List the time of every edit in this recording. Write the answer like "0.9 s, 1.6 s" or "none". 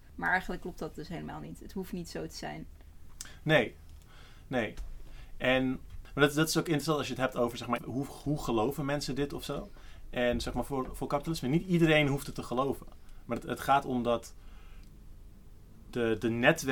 7.8 s